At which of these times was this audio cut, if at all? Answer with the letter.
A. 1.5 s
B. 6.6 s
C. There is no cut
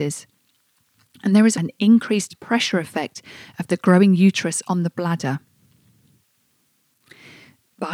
A